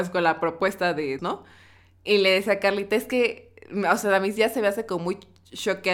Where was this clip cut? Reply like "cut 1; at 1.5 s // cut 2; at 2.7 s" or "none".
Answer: cut 1; at 1.2 s